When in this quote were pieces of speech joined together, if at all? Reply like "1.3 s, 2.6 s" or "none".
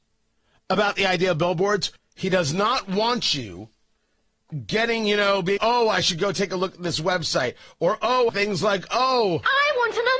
2.0 s, 5.6 s, 8.3 s